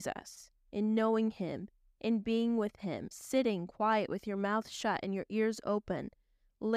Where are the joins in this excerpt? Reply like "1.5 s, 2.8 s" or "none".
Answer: 3.1 s